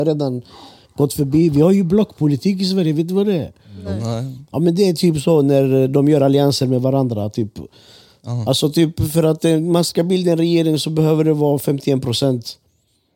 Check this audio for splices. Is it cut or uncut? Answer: uncut